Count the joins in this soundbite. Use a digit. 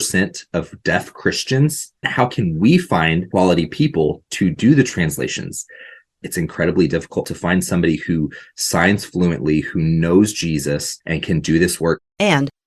0